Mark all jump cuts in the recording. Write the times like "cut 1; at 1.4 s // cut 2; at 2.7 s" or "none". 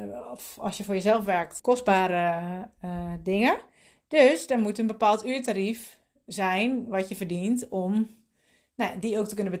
cut 1; at 1.6 s